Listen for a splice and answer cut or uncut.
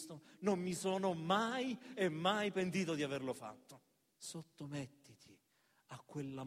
cut